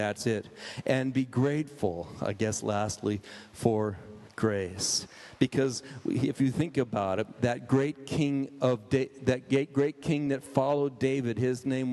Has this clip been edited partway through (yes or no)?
no